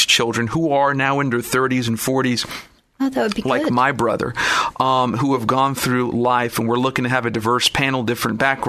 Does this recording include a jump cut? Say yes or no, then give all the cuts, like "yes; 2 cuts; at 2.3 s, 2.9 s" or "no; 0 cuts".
no; 0 cuts